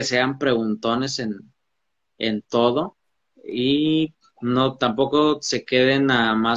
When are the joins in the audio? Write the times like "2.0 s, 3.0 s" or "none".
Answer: none